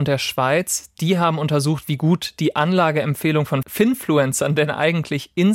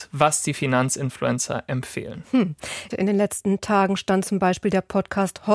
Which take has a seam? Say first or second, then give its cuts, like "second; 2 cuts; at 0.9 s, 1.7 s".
second; 1 cut; at 2.9 s